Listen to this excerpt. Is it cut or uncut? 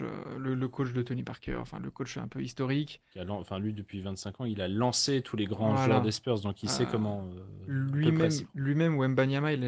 uncut